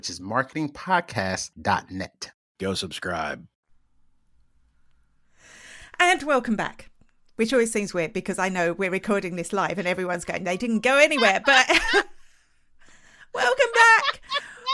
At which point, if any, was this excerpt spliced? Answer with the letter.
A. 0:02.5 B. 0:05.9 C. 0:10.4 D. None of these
A